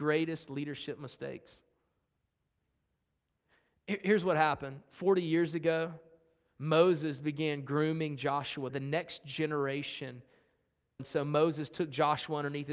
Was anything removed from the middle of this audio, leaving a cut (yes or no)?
yes